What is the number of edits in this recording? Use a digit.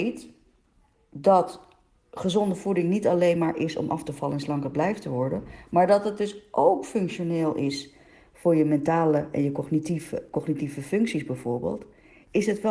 0